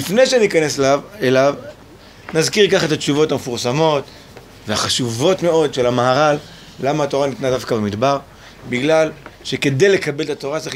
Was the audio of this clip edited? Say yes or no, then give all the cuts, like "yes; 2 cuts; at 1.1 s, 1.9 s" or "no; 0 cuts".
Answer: no; 0 cuts